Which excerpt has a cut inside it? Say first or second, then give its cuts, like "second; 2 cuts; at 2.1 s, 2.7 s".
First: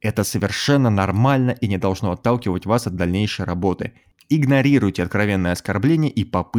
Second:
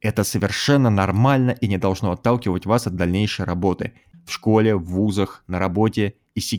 second; 1 cut; at 4.1 s